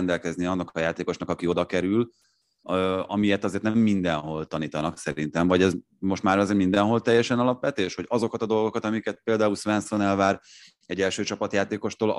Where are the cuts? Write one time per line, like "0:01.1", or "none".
none